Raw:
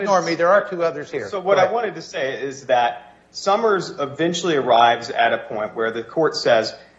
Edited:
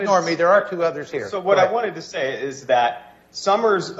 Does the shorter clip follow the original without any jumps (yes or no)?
yes